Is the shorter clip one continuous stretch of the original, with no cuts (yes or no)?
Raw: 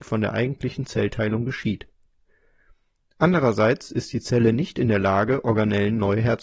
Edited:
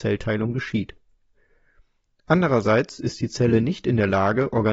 yes